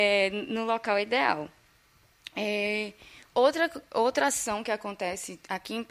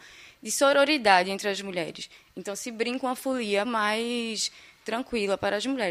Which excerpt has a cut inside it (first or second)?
second